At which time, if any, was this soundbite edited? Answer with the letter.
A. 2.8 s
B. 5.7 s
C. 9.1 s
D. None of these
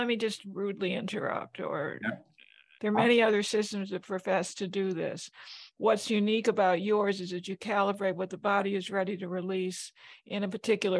A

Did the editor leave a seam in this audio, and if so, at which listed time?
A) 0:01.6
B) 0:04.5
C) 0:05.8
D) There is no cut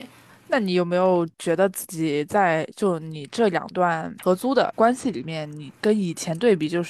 C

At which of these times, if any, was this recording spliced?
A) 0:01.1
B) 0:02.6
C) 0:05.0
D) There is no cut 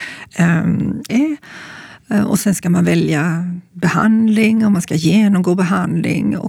A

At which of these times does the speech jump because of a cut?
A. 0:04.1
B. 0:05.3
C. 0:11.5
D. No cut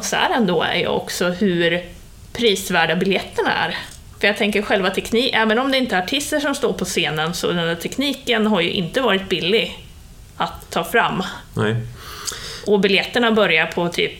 A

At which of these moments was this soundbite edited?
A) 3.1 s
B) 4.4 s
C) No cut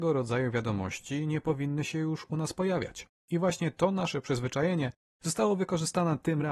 C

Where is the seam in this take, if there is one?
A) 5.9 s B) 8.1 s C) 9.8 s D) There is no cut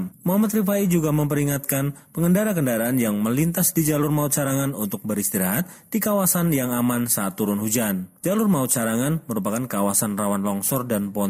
D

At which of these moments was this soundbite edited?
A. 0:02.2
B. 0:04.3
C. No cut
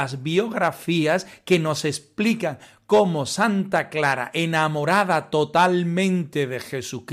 C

